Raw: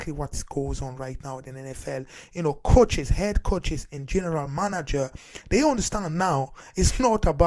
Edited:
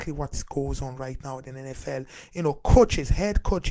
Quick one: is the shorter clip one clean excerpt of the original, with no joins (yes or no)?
yes